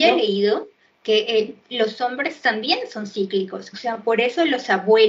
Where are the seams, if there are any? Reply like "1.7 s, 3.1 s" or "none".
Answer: 3.7 s